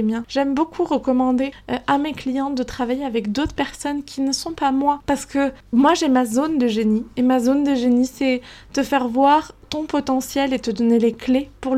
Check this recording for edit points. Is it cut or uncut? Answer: uncut